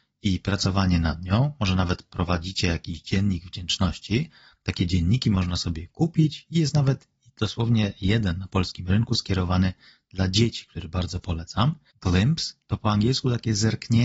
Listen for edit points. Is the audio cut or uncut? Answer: cut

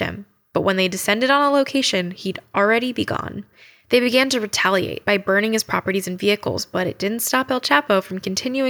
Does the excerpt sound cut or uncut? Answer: uncut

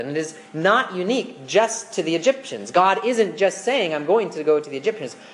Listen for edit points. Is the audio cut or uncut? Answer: uncut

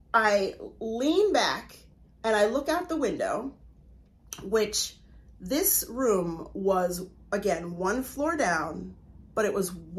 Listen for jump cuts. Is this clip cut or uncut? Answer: uncut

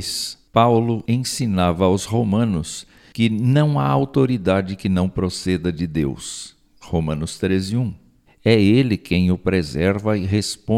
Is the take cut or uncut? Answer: cut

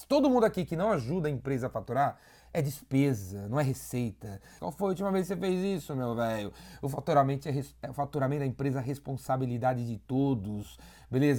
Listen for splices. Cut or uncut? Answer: cut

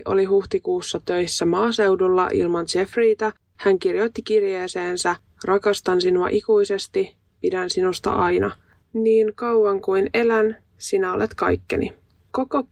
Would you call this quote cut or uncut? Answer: uncut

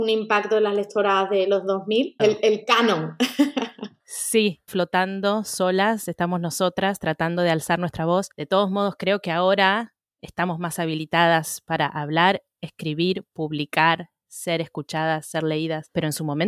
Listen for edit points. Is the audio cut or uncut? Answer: cut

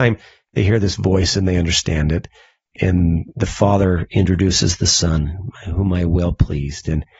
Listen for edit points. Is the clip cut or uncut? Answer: uncut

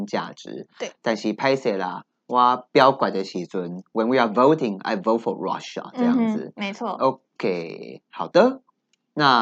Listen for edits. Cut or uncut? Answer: uncut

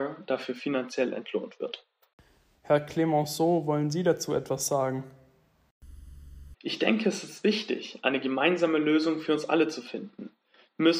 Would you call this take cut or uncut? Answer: cut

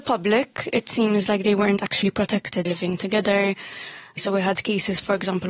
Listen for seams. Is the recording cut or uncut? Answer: cut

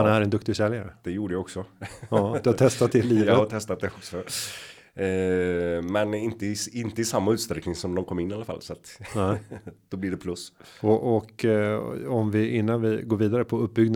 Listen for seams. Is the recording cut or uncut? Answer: uncut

